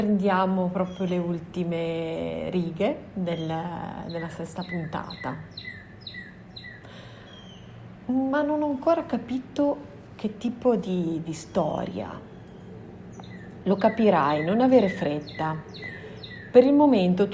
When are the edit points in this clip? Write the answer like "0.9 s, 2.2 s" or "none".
none